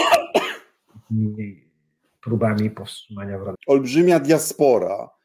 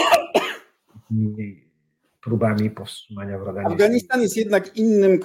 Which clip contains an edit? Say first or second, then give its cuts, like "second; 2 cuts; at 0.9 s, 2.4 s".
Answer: first; 1 cut; at 3.5 s